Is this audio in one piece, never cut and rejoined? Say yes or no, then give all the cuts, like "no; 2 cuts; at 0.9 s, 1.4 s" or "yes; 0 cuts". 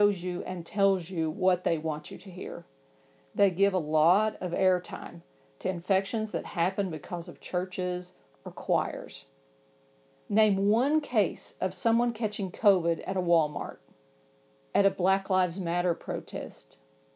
no; 1 cut; at 14.7 s